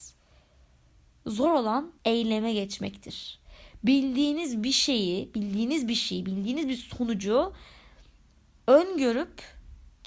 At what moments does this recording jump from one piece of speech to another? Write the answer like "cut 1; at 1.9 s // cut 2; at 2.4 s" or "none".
cut 1; at 2.0 s